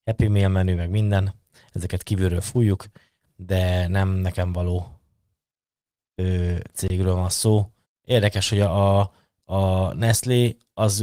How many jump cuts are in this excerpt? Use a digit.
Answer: 1